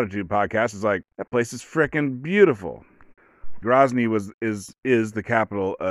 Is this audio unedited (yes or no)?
no